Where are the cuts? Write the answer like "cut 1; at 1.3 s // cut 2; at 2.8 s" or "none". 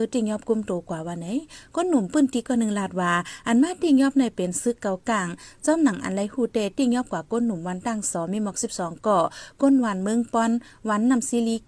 none